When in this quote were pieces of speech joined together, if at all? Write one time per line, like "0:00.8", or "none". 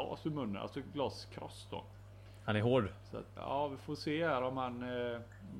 0:03.4

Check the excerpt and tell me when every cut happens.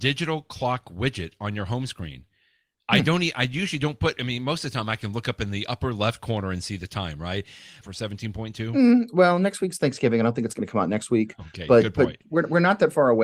0:07.8

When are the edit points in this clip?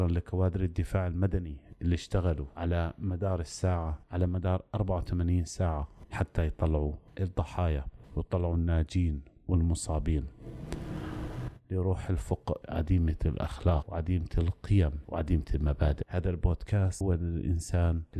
0:12.6

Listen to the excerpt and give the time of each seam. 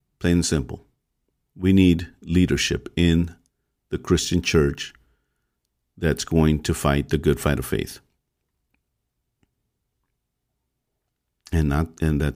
0:01.4

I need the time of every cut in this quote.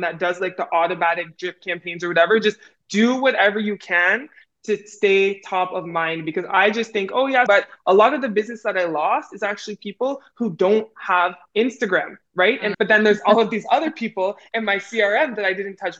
0:07.5
0:12.7

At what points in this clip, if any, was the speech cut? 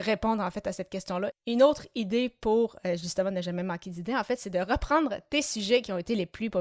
0:01.3

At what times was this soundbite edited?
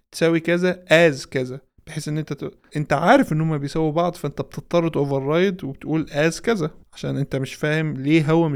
0:02.7

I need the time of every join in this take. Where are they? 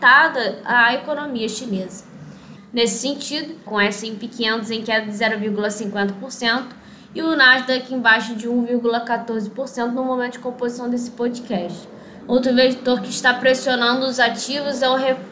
0:02.6
0:03.7
0:12.2

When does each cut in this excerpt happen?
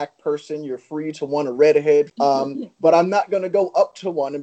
0:02.1

